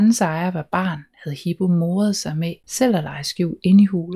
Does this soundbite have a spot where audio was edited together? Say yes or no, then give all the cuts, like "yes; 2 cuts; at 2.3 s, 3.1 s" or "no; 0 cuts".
no; 0 cuts